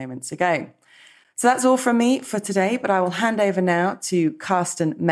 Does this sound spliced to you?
no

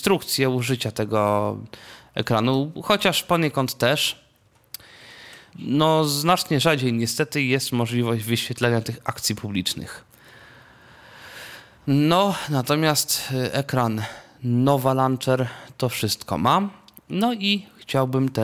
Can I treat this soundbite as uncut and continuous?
no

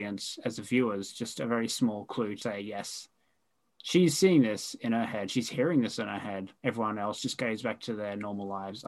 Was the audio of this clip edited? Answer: yes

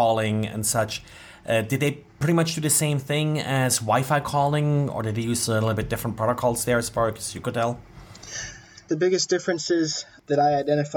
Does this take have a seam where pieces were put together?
yes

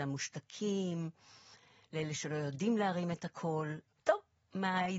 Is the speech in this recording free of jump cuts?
no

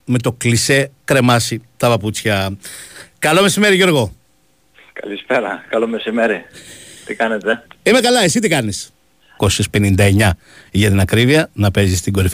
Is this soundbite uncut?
no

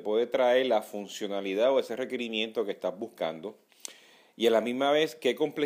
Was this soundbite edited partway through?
no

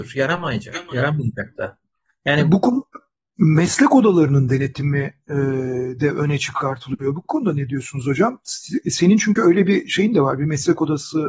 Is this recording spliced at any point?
no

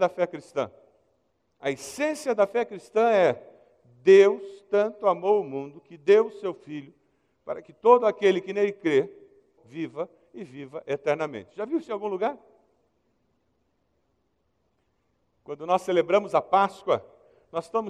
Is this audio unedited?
no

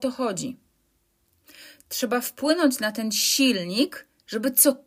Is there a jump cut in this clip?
no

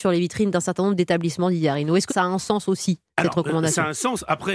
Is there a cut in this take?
yes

